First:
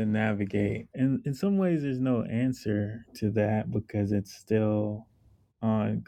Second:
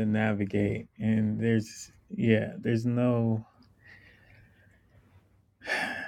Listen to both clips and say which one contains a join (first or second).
first